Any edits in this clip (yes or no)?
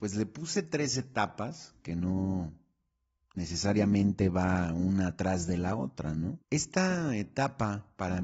yes